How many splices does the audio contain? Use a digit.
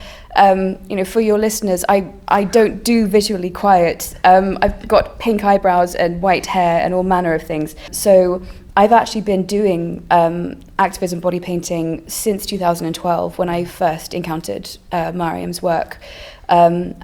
1